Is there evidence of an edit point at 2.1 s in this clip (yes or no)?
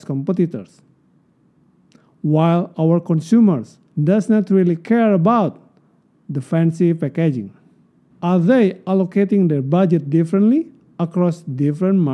no